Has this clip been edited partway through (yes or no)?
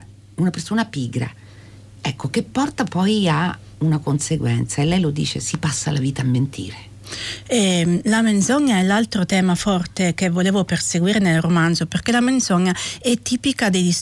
no